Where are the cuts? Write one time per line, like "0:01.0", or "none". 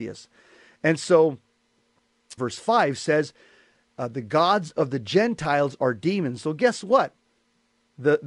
0:02.4